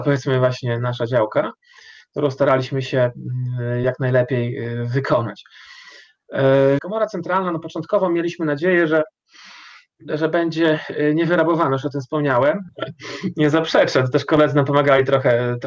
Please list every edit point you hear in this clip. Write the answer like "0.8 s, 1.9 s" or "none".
6.8 s, 12.7 s

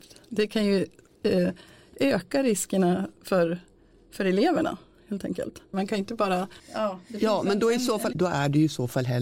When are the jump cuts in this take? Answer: 5.7 s, 8.1 s

